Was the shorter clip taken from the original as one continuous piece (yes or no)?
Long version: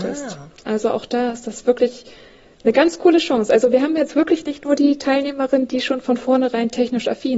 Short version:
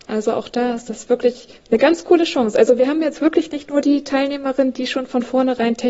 no